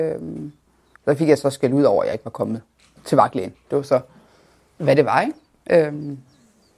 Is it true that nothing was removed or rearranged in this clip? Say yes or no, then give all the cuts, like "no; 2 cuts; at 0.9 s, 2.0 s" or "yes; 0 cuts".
no; 1 cut; at 1.0 s